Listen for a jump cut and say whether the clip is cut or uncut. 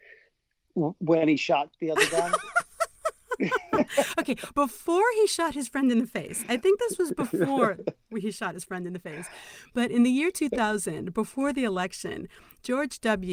uncut